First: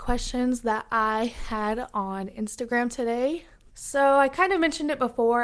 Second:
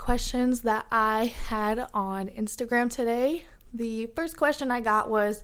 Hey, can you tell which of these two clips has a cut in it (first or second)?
first